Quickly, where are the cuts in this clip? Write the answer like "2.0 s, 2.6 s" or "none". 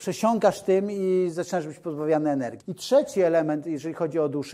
2.6 s